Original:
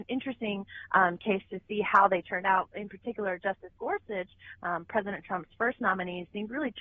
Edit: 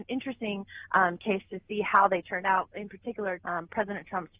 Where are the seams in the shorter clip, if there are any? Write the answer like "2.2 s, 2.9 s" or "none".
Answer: 3.4 s